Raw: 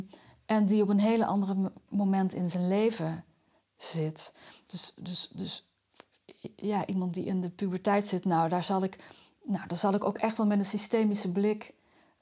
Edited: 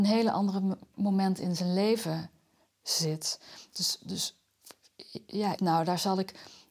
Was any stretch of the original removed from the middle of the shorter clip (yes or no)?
yes